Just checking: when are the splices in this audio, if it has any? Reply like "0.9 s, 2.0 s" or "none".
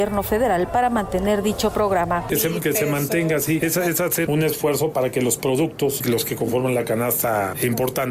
4.3 s, 6.0 s